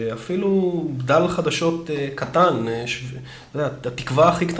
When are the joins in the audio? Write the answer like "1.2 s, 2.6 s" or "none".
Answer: none